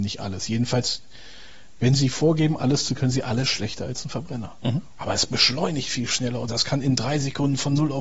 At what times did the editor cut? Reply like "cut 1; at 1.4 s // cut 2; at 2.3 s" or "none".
cut 1; at 3.0 s // cut 2; at 5.0 s